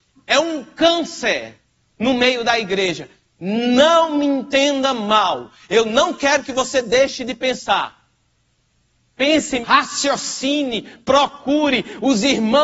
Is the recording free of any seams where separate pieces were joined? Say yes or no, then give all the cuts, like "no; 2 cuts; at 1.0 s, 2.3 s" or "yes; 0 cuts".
no; 1 cut; at 9.6 s